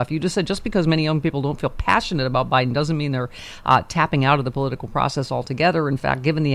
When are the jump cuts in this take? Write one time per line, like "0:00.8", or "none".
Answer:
none

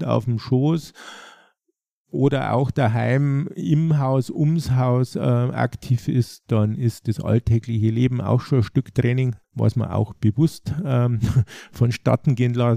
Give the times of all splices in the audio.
0:09.4

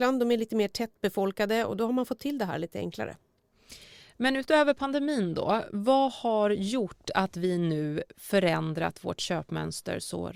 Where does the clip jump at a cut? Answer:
none

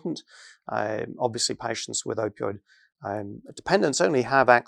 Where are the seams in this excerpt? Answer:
none

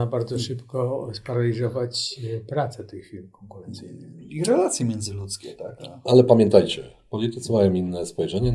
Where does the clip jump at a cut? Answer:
none

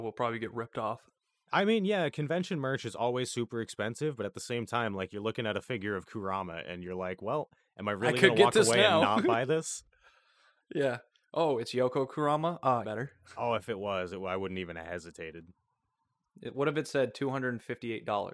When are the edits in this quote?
0:12.8

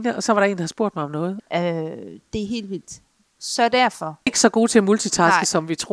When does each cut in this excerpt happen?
0:01.4
0:04.3

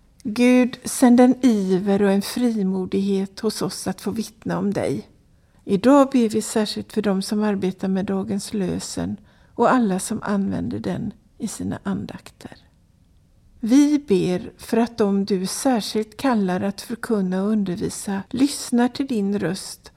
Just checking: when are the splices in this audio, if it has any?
0:05.5
0:13.6
0:18.3

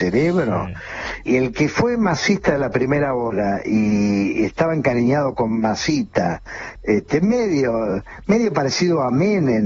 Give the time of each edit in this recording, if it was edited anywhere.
0:01.3
0:06.8

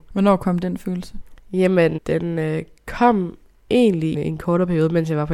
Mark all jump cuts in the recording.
0:02.0
0:04.1

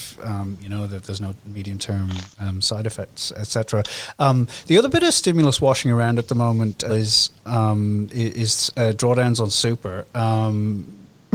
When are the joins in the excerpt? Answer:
0:06.9

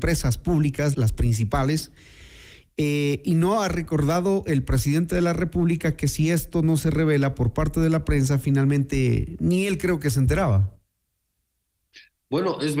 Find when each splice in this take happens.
0:00.9

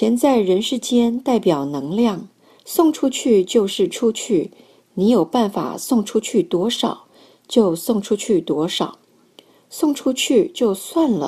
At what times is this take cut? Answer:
0:02.6

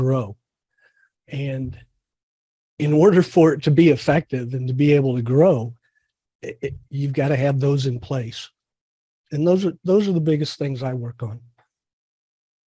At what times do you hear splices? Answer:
0:01.1
0:06.8

